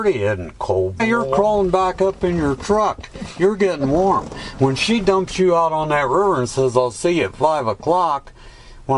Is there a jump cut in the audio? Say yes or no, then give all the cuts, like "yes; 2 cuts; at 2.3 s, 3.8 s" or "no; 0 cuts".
yes; 1 cut; at 1.0 s